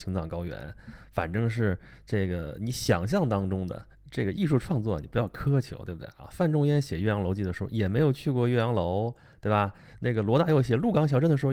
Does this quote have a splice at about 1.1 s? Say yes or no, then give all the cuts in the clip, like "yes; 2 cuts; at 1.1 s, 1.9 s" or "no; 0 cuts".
no; 1 cut; at 3.9 s